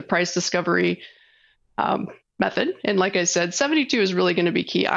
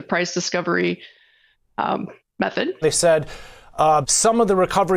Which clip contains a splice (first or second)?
second